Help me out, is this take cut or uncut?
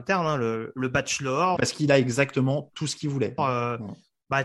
cut